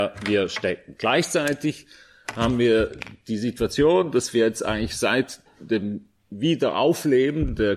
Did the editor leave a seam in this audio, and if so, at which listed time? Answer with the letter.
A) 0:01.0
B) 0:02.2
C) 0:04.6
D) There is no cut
D